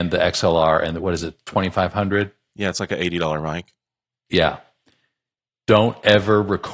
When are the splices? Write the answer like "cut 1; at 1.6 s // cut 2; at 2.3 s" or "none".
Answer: none